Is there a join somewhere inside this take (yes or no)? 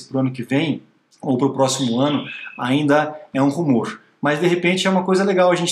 no